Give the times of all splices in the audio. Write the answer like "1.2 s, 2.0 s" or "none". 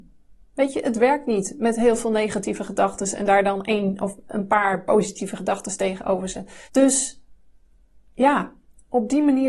6.7 s